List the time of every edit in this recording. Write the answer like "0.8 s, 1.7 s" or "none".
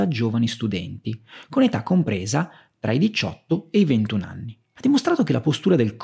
4.8 s